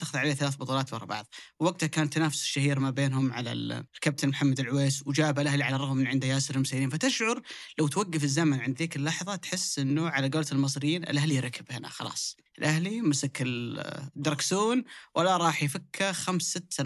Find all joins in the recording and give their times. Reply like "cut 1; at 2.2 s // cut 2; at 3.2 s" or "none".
cut 1; at 3.9 s // cut 2; at 12.5 s